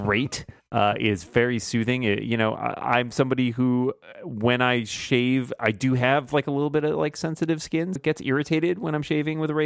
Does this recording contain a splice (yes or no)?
yes